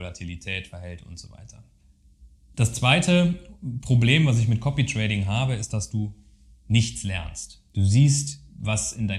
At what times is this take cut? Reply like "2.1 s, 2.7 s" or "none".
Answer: none